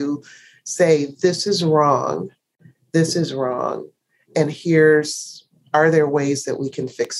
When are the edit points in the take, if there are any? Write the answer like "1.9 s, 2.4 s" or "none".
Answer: none